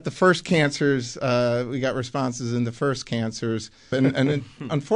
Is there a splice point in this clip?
yes; 1 cut; at 3.9 s

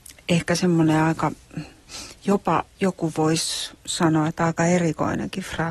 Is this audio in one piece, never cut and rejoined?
yes; 0 cuts

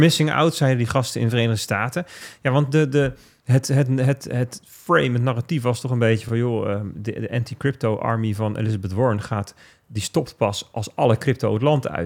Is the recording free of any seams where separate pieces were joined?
yes; 0 cuts

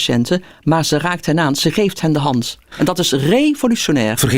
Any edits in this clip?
no; 0 cuts

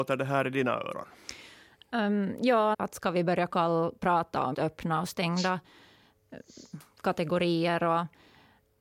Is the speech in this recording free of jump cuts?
no; 2 cuts; at 2.7 s, 4.5 s

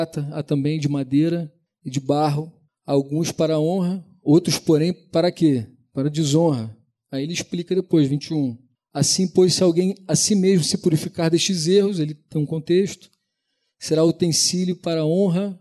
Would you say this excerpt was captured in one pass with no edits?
yes; 0 cuts

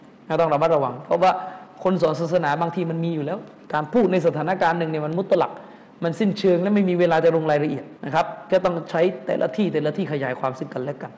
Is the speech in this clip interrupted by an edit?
yes; 1 cut; at 8.0 s

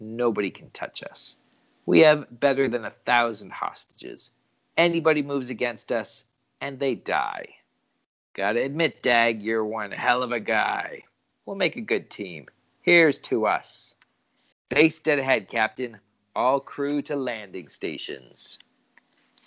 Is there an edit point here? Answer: no; 0 cuts

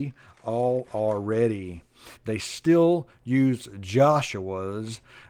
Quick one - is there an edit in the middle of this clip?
yes; 1 cut; at 2.2 s

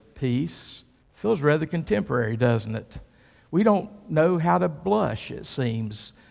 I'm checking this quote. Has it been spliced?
yes; 1 cut; at 1.0 s

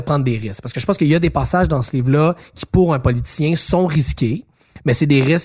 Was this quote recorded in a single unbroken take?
yes; 0 cuts

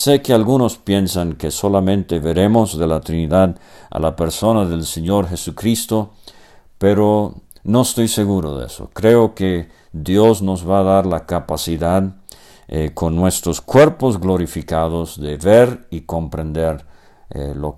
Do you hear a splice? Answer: no; 0 cuts

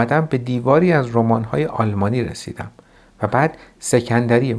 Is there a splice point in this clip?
no; 0 cuts

